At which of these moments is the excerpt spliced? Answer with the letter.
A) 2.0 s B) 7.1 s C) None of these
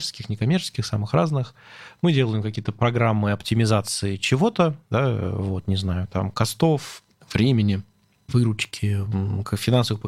C